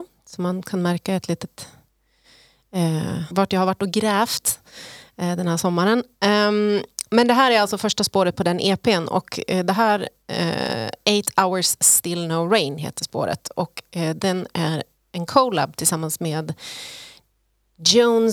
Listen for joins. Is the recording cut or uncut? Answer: cut